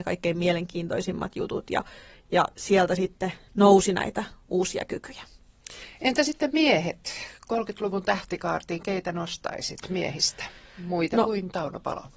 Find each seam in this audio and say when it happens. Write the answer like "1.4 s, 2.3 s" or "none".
none